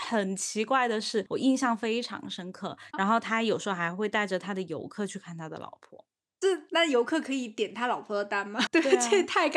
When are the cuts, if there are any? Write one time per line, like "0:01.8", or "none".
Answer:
0:02.9
0:08.7